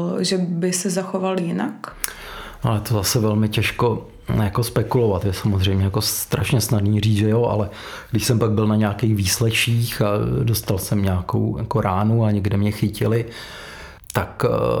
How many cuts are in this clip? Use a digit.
0